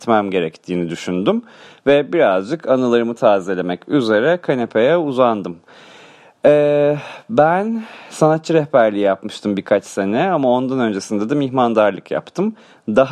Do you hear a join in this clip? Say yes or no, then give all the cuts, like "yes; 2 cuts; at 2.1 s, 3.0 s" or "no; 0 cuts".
no; 0 cuts